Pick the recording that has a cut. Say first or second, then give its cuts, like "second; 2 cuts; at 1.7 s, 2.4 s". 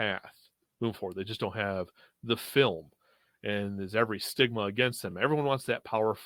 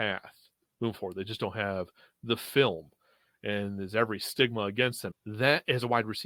second; 1 cut; at 5.1 s